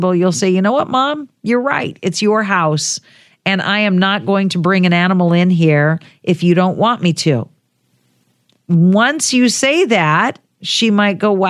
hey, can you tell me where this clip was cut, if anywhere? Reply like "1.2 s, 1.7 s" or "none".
none